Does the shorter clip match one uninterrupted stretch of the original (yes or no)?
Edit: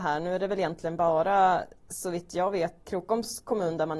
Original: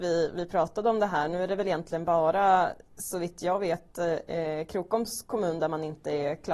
no